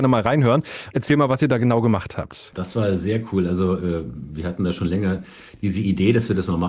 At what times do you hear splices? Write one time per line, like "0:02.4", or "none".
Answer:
0:00.9

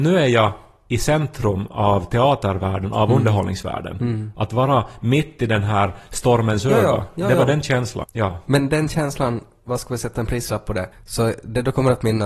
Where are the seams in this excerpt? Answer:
0:08.0
0:10.9

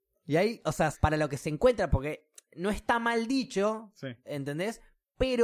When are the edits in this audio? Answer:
0:00.9

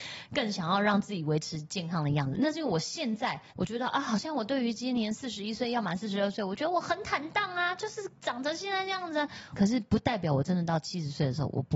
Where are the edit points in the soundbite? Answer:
0:03.5
0:09.5

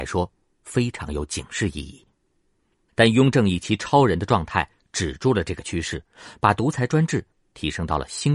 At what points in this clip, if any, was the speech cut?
0:02.9

